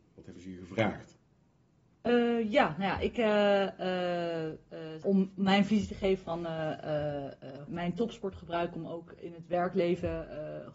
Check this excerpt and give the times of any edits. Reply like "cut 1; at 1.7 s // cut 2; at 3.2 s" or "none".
cut 1; at 5.0 s // cut 2; at 7.7 s